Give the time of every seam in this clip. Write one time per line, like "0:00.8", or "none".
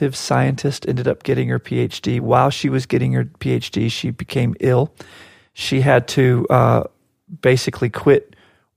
none

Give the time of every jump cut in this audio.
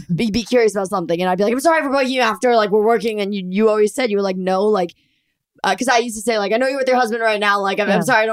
none

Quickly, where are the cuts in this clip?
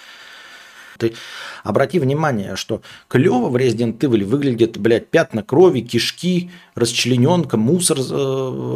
0:01.0

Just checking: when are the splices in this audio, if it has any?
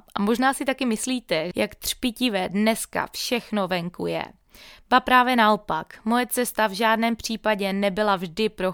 0:01.5

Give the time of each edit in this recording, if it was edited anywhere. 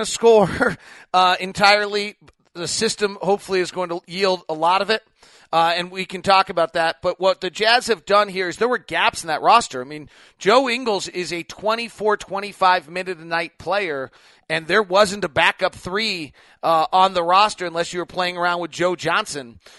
none

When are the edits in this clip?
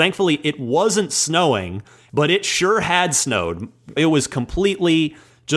0:02.1
0:04.0

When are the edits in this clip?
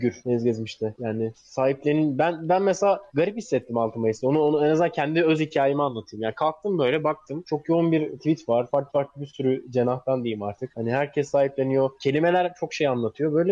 none

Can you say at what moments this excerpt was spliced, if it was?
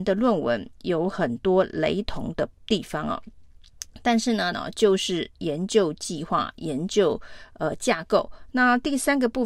0:04.5
0:08.5

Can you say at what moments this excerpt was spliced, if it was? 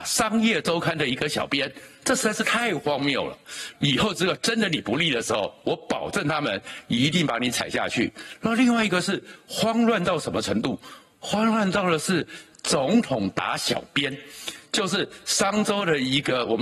0:03.7

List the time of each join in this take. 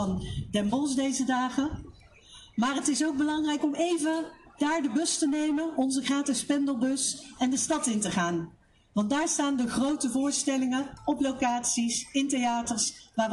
none

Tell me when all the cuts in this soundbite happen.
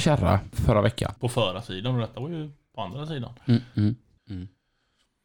0:01.2
0:04.2

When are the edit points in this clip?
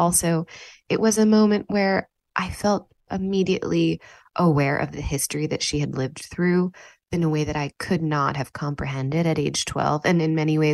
0:03.1

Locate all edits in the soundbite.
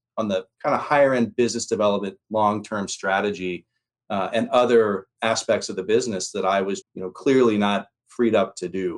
0:05.2
0:06.8

